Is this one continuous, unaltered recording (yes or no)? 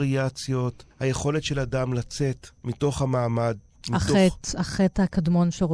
no